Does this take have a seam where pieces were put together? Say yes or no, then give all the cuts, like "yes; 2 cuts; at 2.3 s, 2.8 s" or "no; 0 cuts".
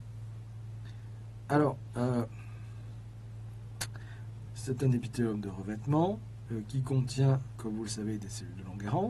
yes; 2 cuts; at 4.5 s, 6.5 s